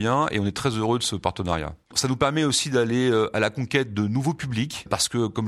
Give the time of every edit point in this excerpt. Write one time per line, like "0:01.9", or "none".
0:01.9